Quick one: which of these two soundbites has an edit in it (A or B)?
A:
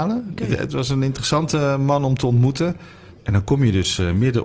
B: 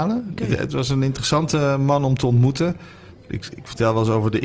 A